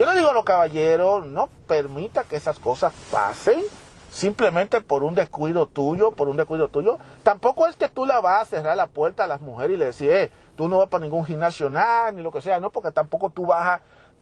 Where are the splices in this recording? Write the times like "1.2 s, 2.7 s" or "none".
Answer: none